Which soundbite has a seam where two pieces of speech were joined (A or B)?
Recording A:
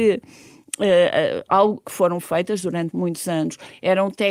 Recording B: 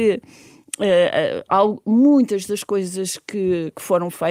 A